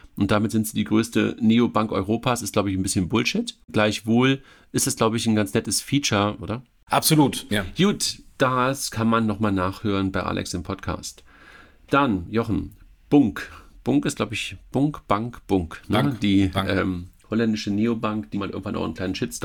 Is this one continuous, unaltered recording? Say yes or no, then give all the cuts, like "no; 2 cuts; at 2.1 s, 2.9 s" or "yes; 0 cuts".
no; 3 cuts; at 6.4 s, 7.5 s, 18.3 s